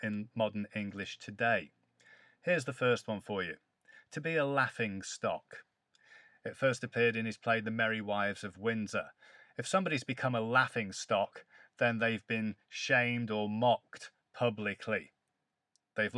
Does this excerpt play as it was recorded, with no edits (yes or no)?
yes